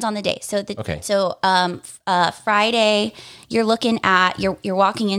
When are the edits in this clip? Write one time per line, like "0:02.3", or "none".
none